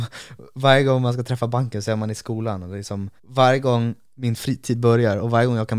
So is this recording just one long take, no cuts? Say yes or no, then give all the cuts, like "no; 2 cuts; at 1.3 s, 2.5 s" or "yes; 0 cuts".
no; 1 cut; at 3.2 s